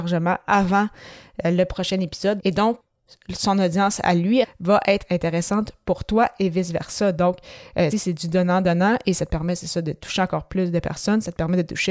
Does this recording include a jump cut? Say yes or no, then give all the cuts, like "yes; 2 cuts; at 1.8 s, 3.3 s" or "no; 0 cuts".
yes; 3 cuts; at 2.4 s, 4.4 s, 7.9 s